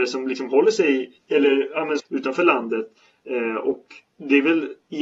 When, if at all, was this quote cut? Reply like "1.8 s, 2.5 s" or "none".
2.0 s